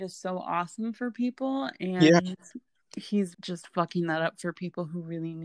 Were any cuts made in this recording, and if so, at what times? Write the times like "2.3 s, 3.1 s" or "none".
3.3 s